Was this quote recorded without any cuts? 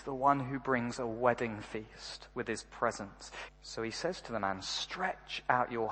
no; 1 cut; at 3.5 s

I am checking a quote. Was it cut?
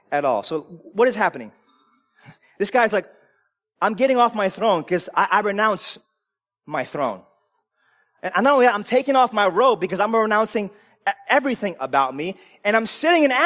no; 0 cuts

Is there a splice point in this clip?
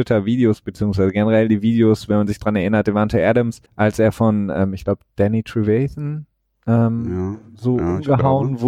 yes; 1 cut; at 3.7 s

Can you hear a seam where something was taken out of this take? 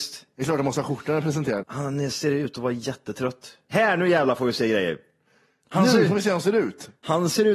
yes; 2 cuts; at 1.6 s, 3.7 s

